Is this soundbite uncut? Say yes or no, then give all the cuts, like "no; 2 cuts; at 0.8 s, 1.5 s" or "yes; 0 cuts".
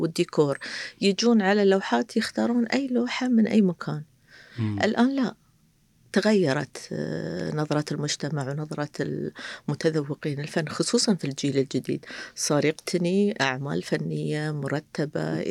yes; 0 cuts